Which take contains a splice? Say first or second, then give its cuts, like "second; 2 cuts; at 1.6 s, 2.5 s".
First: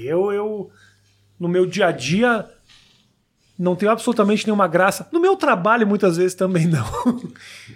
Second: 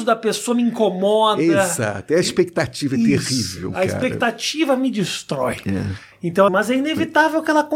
second; 1 cut; at 6.5 s